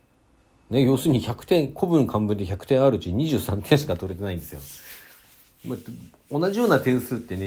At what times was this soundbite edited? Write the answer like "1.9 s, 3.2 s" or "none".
none